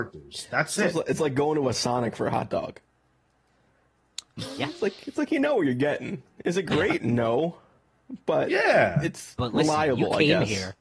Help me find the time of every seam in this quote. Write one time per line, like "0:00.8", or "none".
none